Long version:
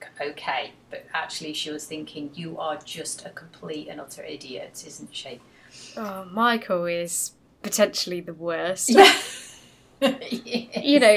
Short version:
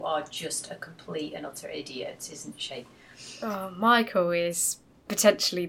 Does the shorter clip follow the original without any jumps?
yes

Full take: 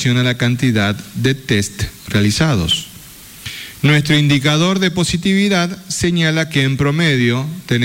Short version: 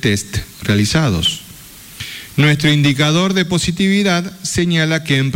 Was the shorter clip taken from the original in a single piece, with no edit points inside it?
yes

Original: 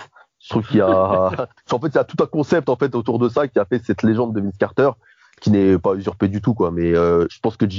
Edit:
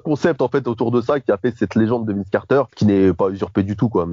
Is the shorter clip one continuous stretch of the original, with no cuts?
no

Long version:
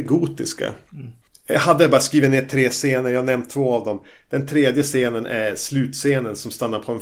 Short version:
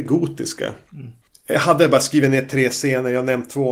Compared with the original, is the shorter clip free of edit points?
yes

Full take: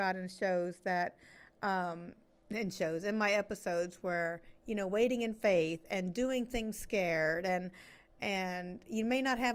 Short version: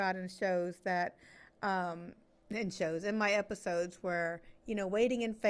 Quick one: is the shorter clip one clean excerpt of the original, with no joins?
yes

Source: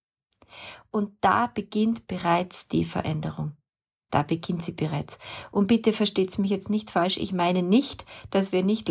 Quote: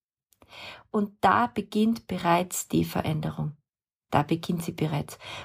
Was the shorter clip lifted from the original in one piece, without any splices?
yes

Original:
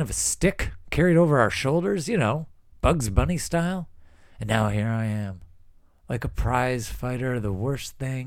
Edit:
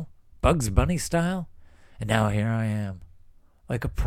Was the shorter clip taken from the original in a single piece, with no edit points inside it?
yes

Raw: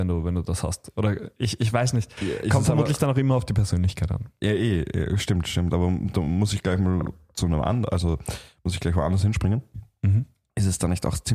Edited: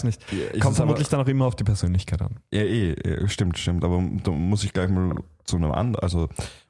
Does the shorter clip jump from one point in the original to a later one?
no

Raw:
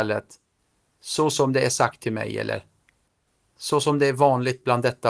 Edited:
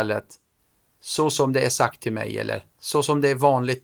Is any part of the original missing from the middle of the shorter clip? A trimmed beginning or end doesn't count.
yes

